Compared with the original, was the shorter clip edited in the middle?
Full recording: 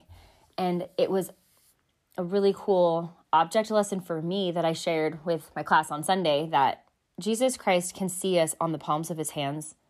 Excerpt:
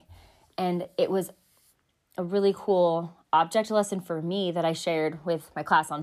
no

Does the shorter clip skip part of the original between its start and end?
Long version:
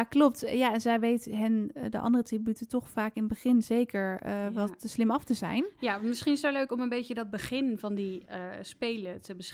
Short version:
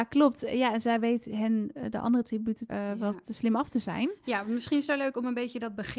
yes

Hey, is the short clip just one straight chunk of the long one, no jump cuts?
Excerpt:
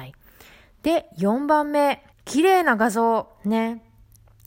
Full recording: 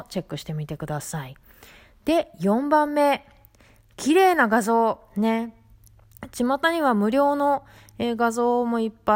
no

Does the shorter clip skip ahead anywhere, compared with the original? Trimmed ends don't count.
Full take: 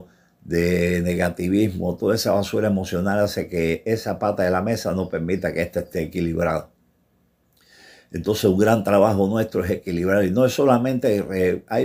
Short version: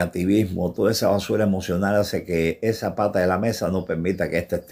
no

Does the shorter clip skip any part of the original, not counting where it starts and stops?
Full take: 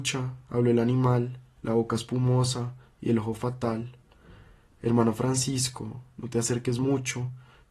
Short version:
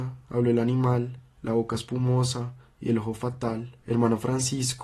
yes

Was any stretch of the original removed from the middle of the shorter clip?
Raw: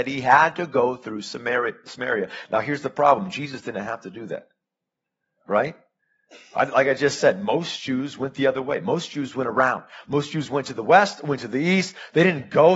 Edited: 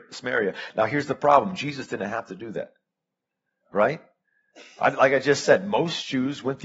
no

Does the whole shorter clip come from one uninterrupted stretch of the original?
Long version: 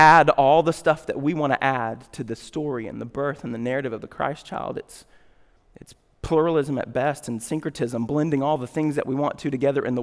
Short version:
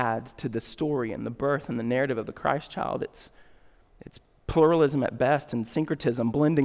yes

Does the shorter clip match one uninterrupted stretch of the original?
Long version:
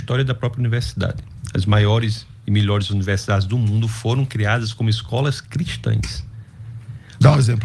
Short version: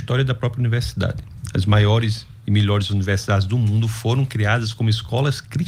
yes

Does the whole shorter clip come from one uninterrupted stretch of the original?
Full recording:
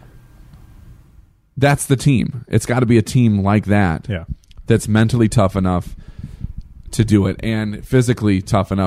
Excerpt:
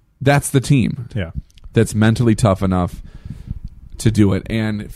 no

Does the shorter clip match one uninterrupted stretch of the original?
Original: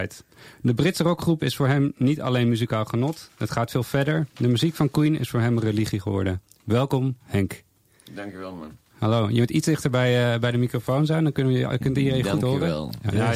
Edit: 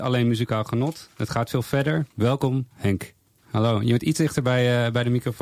no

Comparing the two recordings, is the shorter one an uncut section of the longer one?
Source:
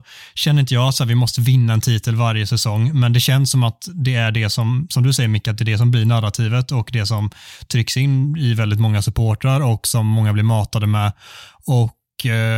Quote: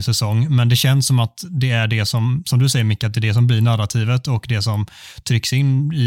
yes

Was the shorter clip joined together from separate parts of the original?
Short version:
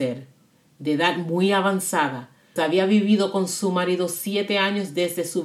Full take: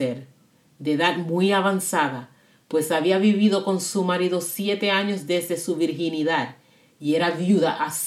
yes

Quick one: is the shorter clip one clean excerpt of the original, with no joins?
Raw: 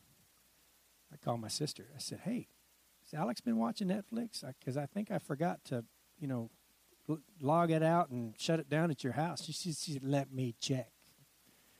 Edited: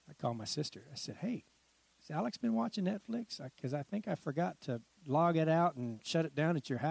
no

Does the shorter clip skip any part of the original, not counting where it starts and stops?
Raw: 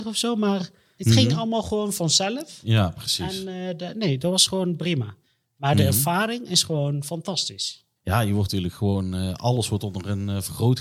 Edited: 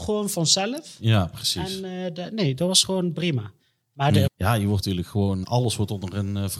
yes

